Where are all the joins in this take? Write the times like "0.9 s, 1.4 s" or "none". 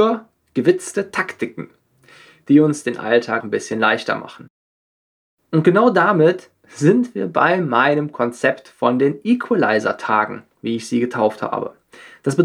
3.4 s

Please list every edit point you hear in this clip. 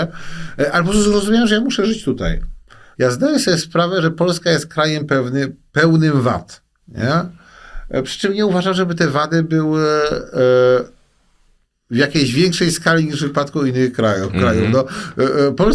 3.0 s

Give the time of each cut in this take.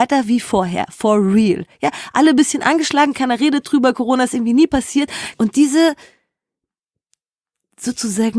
5.3 s

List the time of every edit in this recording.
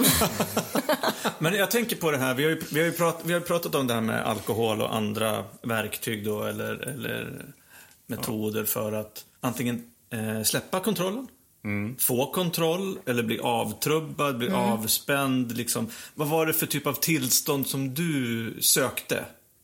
9.3 s

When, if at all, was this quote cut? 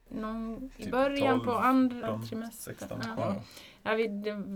2.0 s, 3.2 s

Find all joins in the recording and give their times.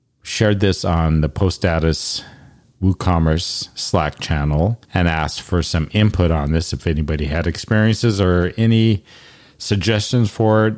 4.9 s

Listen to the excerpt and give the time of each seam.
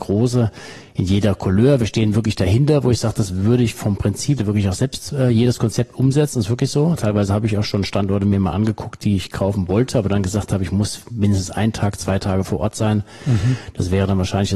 4.4 s

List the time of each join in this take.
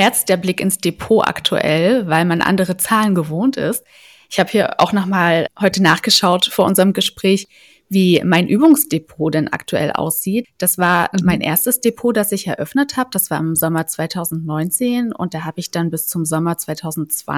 5.5 s, 10.4 s

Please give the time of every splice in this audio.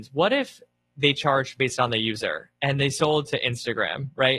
none

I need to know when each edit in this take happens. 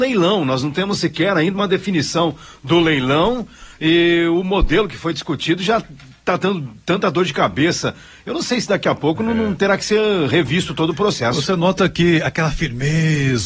none

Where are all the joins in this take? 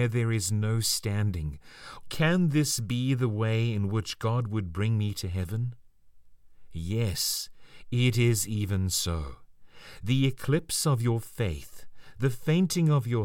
2.0 s, 12.1 s

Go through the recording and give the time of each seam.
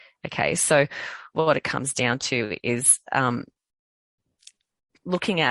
1.3 s

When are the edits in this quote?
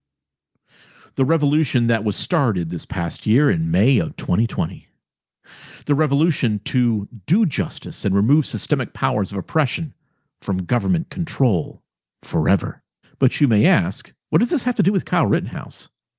13.0 s, 14.2 s

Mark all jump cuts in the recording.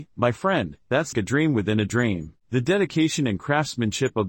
1.1 s, 2.4 s

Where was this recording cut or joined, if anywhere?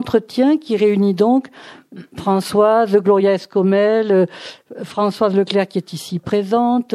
none

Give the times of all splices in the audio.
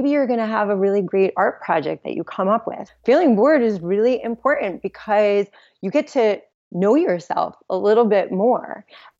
2.9 s

